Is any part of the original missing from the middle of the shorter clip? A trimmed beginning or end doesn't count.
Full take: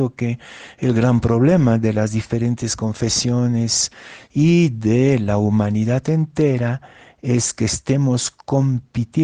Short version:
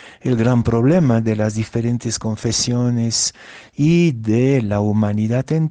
no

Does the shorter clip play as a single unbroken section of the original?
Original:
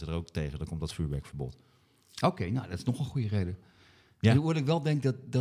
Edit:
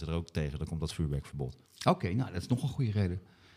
no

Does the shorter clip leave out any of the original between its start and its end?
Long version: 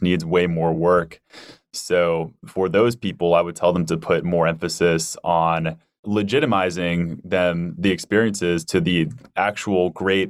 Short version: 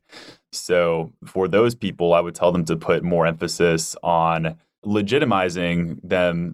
no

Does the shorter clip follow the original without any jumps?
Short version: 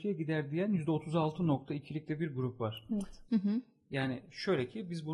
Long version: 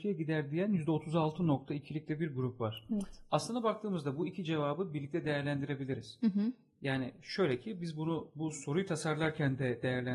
no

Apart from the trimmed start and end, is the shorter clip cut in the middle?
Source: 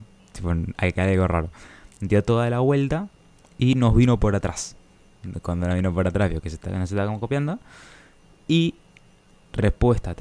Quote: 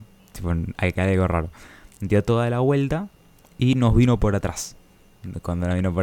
no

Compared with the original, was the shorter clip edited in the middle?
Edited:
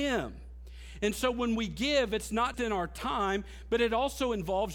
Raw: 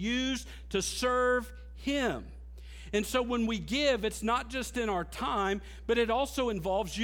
yes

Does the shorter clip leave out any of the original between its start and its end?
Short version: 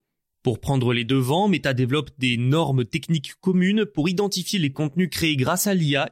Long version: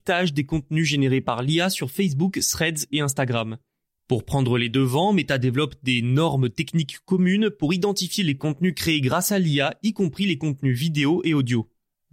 no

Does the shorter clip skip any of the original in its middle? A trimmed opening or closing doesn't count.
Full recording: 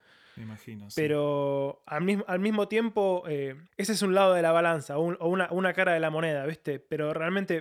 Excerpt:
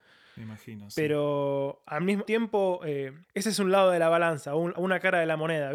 yes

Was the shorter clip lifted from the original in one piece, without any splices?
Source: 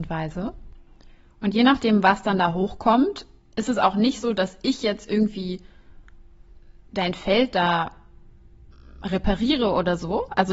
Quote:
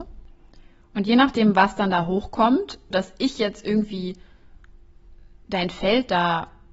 no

